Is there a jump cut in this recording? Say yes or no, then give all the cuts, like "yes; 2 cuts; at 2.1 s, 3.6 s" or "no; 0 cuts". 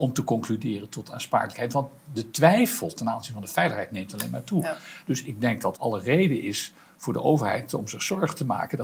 yes; 1 cut; at 5.7 s